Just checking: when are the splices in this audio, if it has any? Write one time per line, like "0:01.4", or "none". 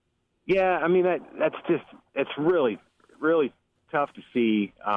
none